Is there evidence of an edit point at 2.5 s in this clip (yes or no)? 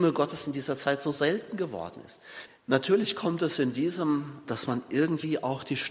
yes